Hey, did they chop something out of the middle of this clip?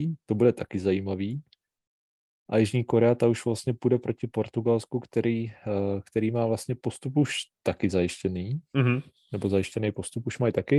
no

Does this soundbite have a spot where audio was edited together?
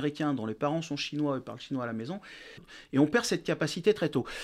yes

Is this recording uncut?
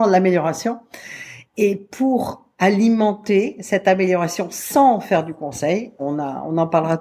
no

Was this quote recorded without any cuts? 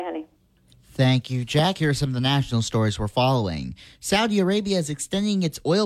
yes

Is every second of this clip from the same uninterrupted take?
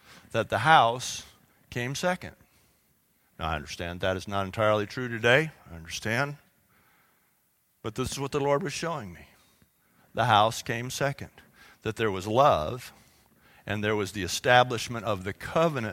no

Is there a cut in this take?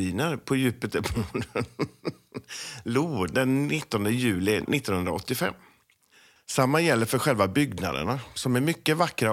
yes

